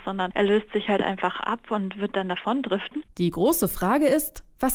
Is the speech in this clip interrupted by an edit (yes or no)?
yes